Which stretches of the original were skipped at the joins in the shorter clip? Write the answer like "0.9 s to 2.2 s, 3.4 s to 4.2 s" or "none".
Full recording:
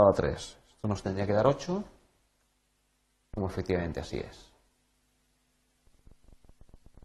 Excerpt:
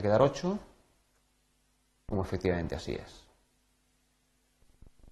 none